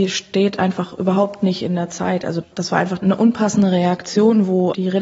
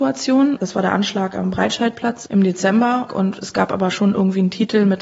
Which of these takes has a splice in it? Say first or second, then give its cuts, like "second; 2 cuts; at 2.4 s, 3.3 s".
second; 1 cut; at 3.1 s